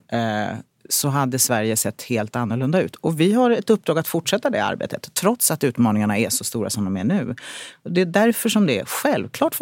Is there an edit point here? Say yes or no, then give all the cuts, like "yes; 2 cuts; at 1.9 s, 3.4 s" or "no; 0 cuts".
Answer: no; 0 cuts